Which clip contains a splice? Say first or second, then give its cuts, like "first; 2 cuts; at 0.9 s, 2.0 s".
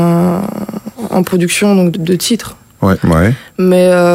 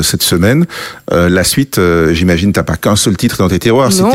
first; 2 cuts; at 1.9 s, 3.0 s